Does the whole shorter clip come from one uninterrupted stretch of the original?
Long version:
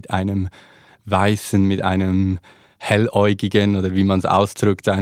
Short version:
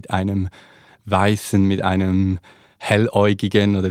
yes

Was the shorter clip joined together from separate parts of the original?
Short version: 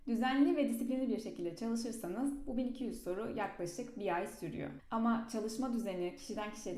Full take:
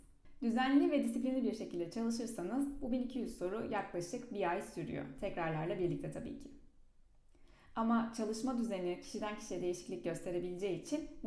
yes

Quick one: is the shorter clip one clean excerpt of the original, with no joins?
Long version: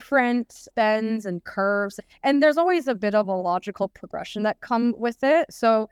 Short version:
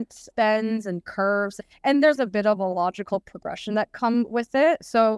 no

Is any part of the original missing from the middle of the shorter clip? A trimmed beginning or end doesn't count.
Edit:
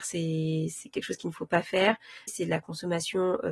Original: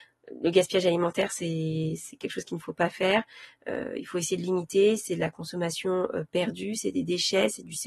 yes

